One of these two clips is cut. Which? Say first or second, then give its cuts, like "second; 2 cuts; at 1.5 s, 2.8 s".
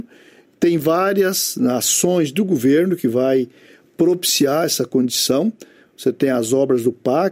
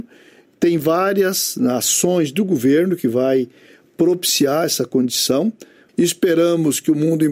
second; 1 cut; at 5.9 s